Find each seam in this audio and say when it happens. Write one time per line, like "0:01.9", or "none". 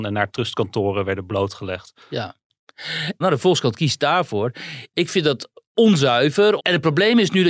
0:03.2
0:06.6